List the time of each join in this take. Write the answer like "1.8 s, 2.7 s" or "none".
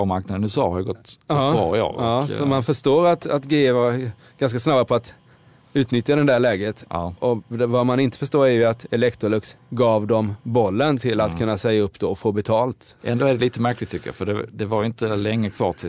13.0 s